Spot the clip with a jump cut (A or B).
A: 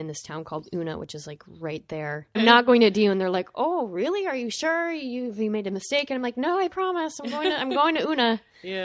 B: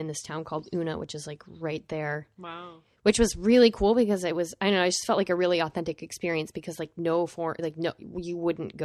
A